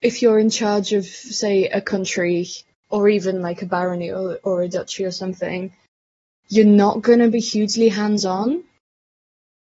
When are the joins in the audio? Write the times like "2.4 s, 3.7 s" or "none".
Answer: none